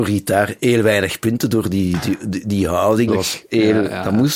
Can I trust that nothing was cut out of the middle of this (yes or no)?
no